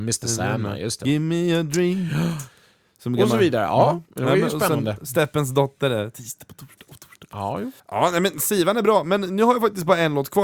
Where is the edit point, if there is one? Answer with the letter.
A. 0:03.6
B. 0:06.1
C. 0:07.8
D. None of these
C